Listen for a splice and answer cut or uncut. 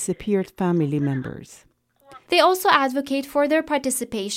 cut